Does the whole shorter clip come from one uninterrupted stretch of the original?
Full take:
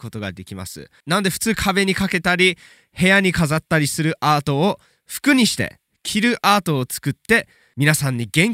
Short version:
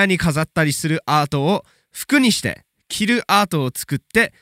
yes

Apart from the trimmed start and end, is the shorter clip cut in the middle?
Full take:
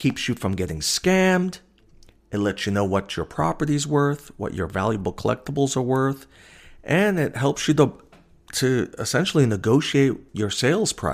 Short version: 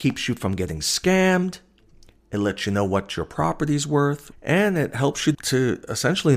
yes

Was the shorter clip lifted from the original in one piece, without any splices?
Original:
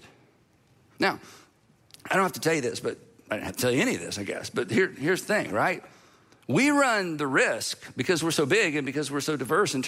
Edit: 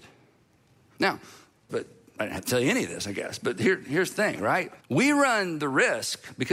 no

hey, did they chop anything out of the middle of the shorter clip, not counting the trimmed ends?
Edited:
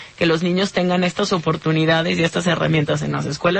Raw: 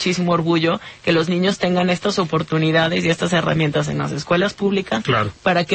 no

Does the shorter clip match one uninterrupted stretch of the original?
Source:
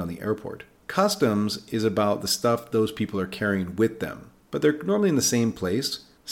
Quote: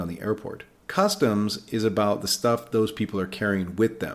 yes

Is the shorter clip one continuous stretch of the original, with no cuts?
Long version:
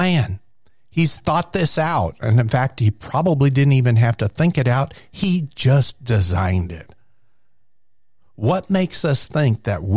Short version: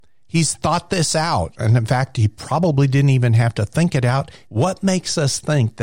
no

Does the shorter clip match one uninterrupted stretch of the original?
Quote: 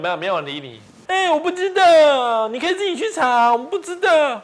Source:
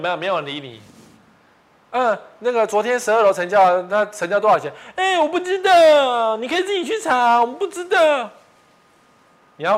no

